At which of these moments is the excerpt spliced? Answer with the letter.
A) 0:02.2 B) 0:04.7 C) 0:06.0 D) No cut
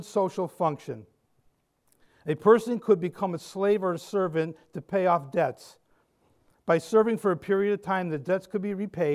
D